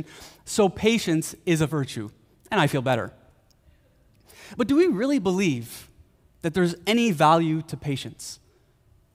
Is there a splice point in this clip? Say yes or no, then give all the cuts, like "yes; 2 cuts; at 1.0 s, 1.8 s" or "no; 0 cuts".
no; 0 cuts